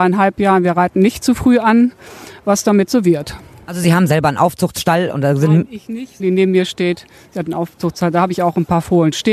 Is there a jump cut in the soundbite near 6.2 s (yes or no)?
yes